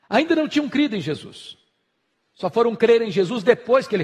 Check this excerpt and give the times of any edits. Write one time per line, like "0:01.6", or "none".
none